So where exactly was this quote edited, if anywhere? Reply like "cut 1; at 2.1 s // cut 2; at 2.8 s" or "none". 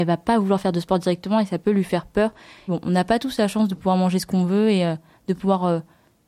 cut 1; at 2.7 s